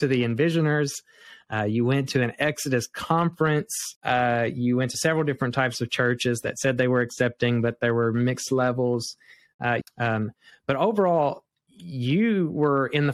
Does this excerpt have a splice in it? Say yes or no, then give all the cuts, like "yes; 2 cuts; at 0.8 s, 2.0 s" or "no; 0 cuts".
yes; 2 cuts; at 4.0 s, 9.8 s